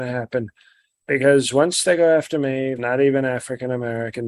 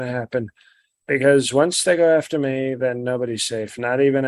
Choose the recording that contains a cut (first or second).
first